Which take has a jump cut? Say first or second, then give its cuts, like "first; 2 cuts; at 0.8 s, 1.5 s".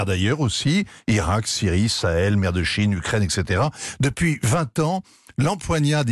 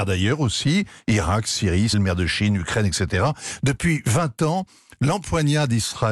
second; 1 cut; at 1.9 s